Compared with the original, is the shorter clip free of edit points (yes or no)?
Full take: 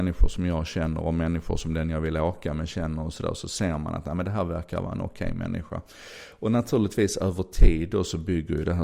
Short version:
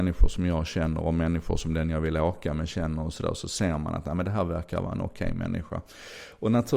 yes